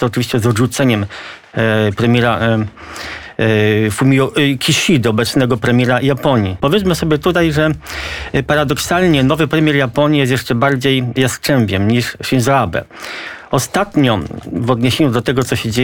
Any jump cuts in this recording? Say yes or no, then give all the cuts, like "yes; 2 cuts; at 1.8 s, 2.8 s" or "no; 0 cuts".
yes; 1 cut; at 6.6 s